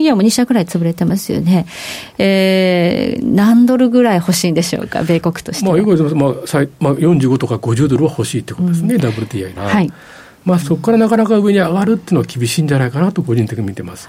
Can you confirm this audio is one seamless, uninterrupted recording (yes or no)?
no